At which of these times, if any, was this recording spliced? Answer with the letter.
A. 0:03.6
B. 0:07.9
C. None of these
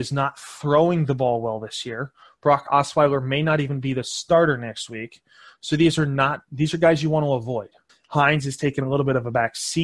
B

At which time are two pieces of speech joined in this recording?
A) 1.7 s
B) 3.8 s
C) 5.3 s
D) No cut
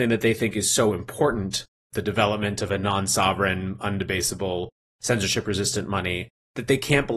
A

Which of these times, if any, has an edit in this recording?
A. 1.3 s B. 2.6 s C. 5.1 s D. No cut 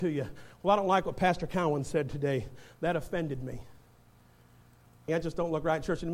C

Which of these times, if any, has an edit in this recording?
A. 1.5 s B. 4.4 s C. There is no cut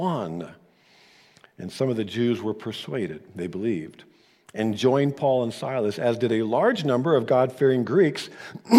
C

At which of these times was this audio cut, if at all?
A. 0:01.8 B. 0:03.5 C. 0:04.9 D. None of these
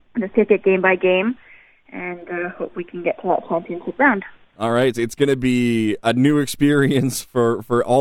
C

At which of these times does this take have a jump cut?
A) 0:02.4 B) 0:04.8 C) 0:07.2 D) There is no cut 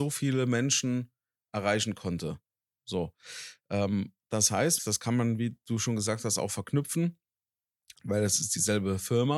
B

